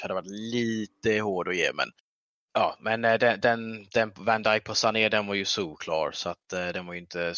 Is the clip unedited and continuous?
yes; 0 cuts

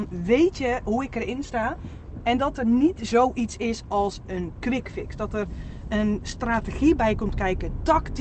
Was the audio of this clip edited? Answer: no; 0 cuts

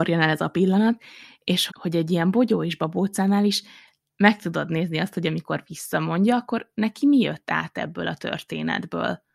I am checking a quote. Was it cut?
yes; 1 cut; at 1.7 s

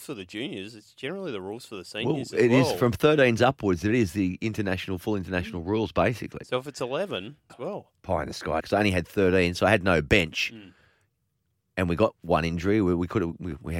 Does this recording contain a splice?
yes; 2 cuts; at 7.5 s, 8.6 s

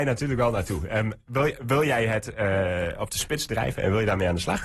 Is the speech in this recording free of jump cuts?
yes; 0 cuts

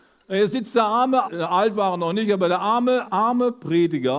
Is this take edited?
yes; 2 cuts; at 1.2 s, 3.0 s

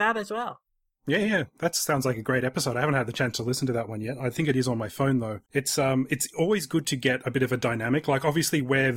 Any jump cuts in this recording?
yes; 1 cut; at 5.4 s

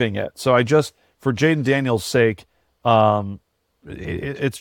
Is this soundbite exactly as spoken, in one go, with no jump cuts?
yes; 0 cuts

